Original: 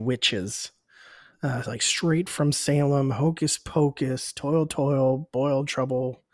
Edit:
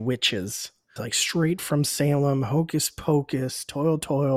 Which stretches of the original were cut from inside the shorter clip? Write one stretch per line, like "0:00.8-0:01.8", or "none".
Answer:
0:01.0-0:01.6